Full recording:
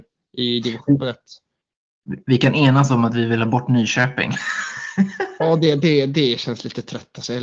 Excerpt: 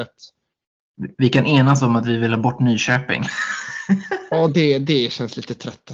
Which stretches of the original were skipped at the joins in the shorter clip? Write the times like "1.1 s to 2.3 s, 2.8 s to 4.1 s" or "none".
5.6 s to 5.8 s